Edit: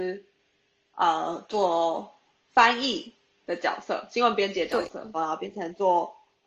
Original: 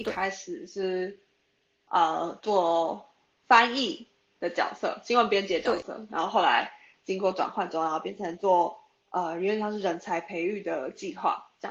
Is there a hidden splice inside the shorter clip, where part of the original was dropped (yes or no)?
yes